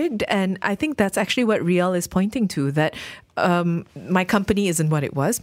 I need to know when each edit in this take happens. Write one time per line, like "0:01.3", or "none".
0:03.9